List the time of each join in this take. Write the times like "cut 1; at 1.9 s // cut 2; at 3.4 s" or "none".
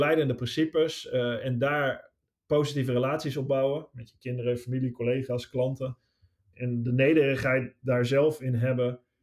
cut 1; at 6.5 s